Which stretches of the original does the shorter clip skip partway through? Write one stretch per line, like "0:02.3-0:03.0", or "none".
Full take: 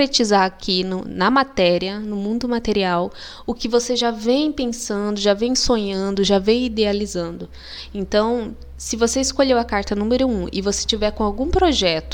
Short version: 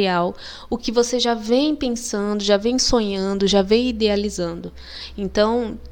none